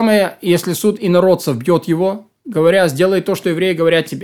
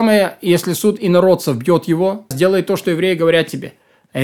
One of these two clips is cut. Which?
second; 1 cut; at 2.3 s

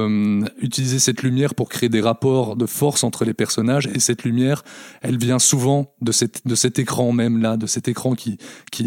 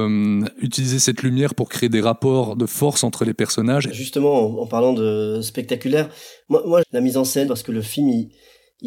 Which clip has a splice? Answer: second; 2 cuts; at 3.9 s, 6.8 s

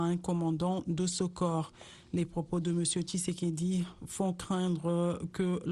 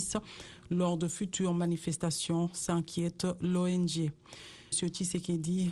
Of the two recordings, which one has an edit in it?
second; 1 cut; at 4.7 s

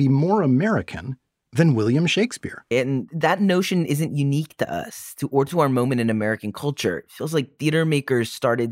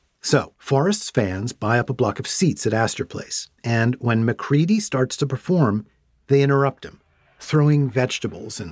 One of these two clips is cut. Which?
first; 1 cut; at 2.7 s

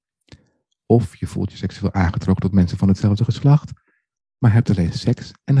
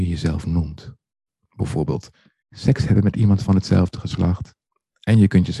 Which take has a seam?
second; 1 cut; at 2.4 s

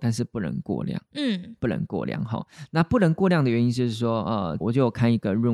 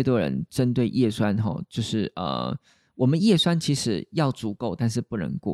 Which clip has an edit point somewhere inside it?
first; 2 cuts; at 1.0 s, 4.6 s

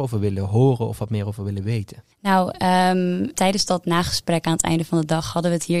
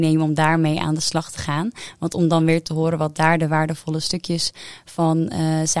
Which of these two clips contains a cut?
first; 2 cuts; at 2.1 s, 3.3 s

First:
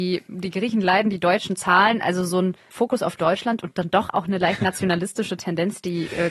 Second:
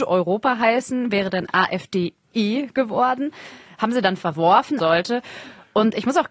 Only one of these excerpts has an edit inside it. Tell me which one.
second; 1 cut; at 4.8 s

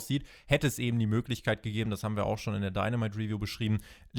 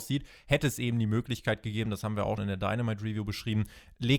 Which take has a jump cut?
second; 1 cut; at 2.4 s

